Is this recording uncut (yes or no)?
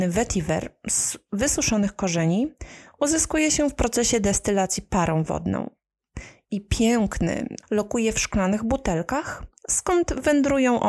no